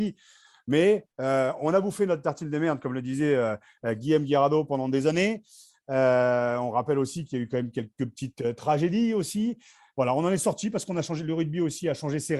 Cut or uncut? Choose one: uncut